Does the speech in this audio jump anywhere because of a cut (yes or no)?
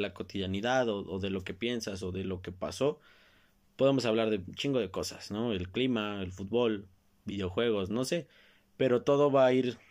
no